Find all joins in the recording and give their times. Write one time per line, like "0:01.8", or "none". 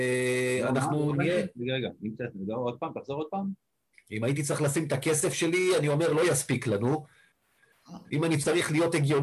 none

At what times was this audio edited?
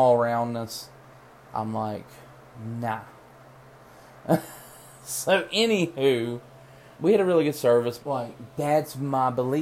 0:06.9
0:08.0

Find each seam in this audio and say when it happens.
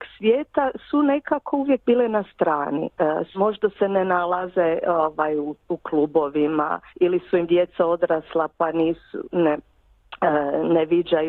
0:03.3
0:06.9

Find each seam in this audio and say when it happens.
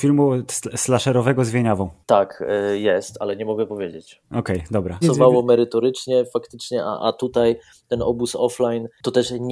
0:05.0

